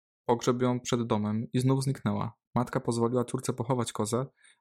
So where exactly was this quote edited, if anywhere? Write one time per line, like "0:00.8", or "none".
0:02.4

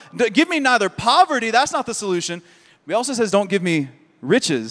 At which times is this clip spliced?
none

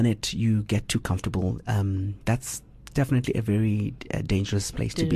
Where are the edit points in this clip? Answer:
none

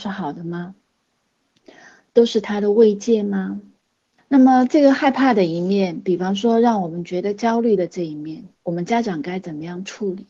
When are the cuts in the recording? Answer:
0:04.2
0:08.6

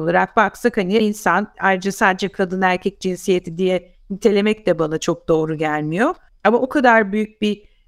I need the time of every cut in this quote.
0:01.0
0:06.3

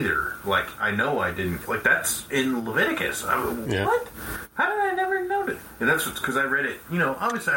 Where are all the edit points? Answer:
0:01.7

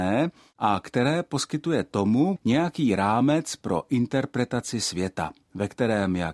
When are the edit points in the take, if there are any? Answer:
0:02.4

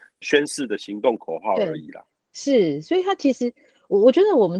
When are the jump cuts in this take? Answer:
none

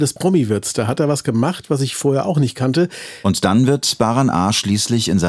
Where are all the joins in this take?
0:03.2

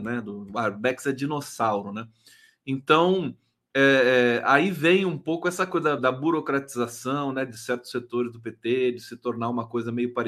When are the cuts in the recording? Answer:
0:06.0

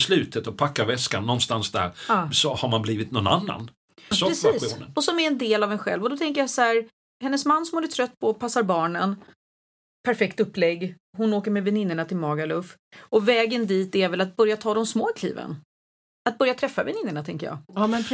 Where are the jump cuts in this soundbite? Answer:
0:04.1

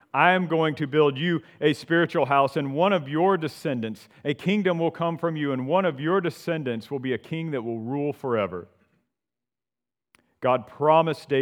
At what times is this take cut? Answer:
none

